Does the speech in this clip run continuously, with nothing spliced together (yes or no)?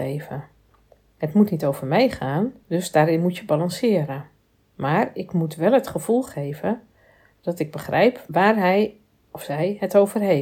yes